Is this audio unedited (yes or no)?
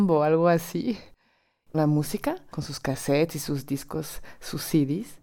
no